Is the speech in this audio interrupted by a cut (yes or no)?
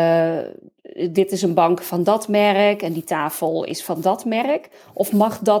no